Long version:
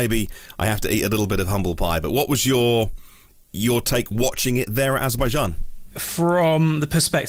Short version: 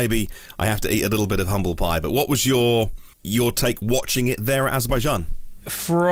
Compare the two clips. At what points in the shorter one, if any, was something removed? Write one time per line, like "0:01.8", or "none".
0:03.1